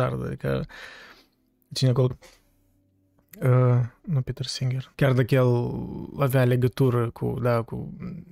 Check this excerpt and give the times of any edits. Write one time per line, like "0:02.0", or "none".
0:02.1
0:04.9